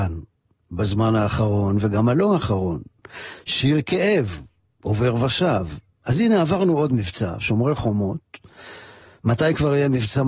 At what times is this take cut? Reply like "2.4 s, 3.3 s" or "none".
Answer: none